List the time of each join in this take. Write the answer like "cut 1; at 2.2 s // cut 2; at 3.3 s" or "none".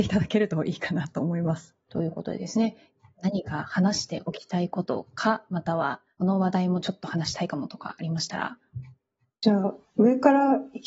cut 1; at 1.8 s

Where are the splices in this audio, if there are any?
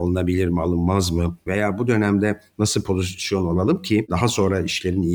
cut 1; at 1.5 s

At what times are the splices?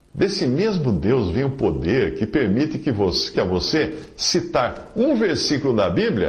cut 1; at 3.3 s

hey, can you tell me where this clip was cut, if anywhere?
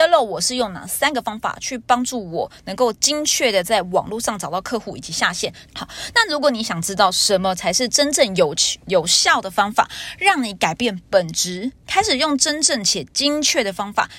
cut 1; at 5.7 s

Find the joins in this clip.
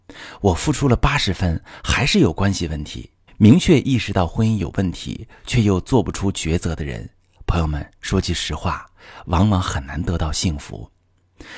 cut 1; at 3.3 s

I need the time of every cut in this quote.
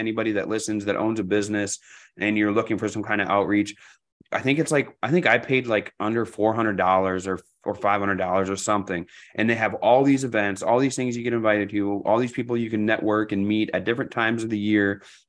none

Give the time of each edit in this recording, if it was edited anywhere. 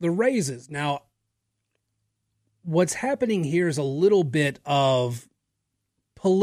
none

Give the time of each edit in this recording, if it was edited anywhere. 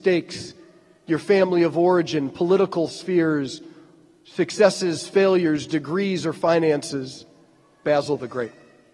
cut 1; at 7.8 s

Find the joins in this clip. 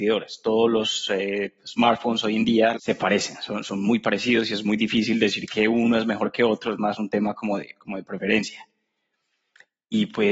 cut 1; at 2.7 s

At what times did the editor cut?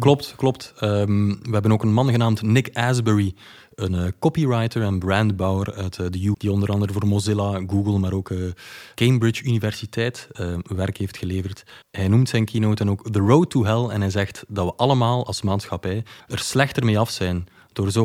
cut 1; at 6.3 s // cut 2; at 11.8 s // cut 3; at 16.2 s

